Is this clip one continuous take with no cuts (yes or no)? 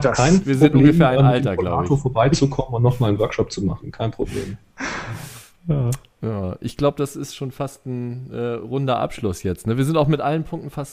yes